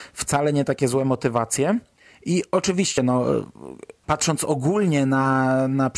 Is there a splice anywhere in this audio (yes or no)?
no